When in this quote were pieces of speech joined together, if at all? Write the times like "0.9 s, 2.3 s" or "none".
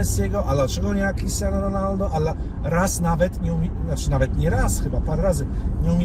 none